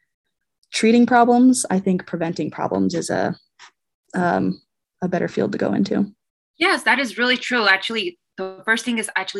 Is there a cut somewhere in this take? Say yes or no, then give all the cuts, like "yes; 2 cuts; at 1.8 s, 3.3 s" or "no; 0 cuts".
no; 0 cuts